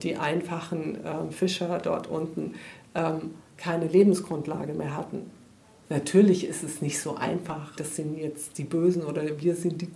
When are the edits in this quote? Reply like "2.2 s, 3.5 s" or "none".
7.8 s